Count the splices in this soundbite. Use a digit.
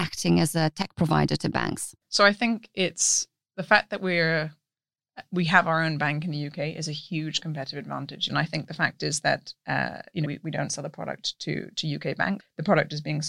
3